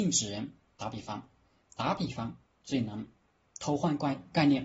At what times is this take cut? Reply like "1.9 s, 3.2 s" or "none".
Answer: none